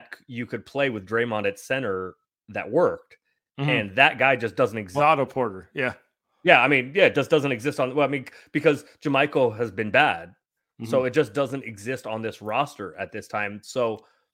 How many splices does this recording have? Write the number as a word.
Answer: one